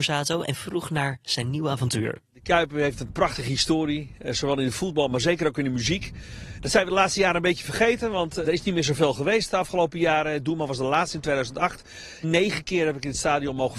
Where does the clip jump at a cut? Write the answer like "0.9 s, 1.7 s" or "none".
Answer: 8.4 s, 12.2 s